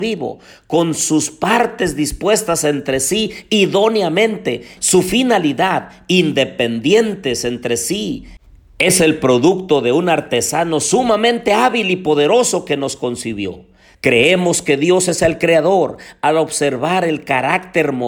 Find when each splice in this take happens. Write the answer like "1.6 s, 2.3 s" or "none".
4.8 s, 13.9 s